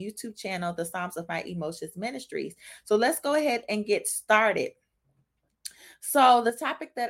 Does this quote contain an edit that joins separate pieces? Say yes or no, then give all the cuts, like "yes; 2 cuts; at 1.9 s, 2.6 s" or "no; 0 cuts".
no; 0 cuts